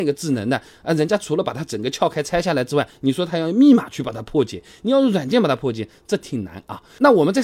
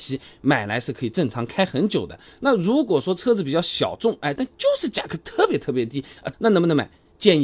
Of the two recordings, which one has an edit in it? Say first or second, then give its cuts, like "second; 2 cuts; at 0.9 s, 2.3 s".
second; 3 cuts; at 2.3 s, 4.4 s, 6.3 s